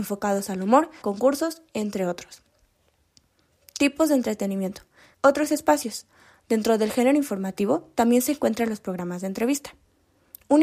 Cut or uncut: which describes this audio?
cut